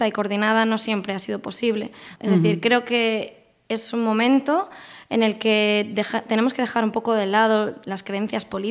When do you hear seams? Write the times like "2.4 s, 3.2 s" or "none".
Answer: 2.2 s

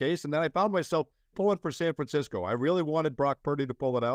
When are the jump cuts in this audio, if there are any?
1.3 s

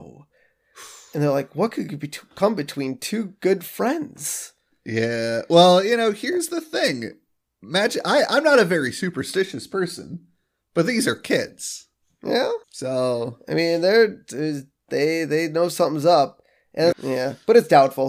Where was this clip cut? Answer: 12.6 s, 16.9 s

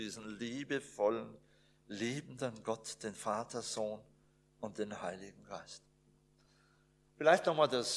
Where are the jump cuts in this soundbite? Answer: none

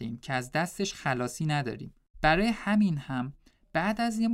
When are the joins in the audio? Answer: 2.1 s

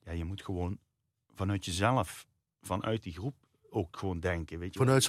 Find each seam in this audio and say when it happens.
none

